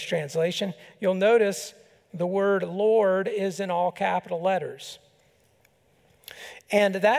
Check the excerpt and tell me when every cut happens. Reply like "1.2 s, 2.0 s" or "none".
none

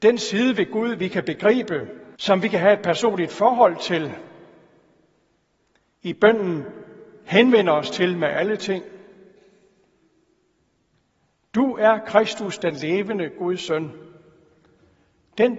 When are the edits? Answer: 2.1 s

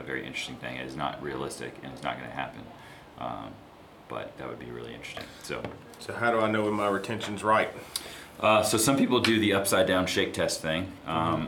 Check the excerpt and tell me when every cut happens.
none

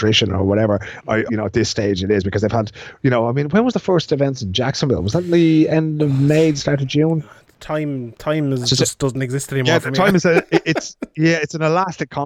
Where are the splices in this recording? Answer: 1.3 s

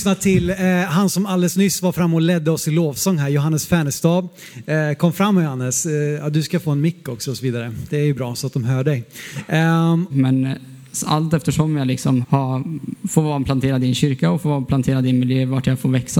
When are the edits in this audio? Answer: 10.1 s, 12.2 s

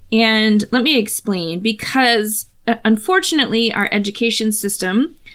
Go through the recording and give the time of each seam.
none

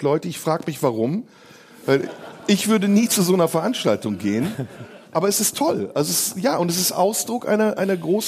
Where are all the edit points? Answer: 5.1 s

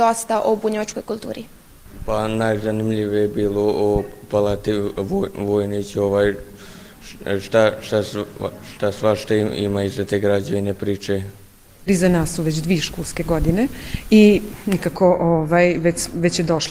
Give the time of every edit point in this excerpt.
none

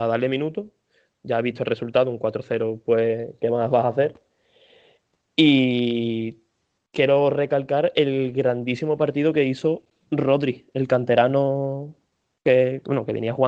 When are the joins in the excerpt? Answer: none

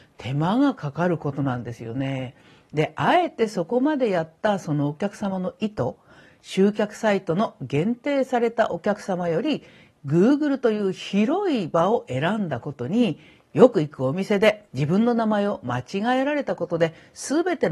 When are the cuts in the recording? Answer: none

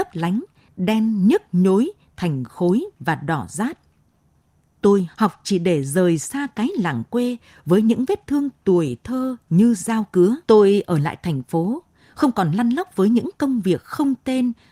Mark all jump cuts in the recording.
5.1 s, 10.4 s

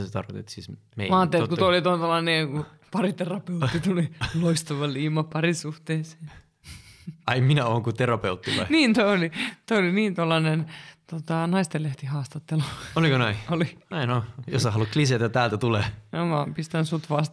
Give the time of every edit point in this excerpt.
none

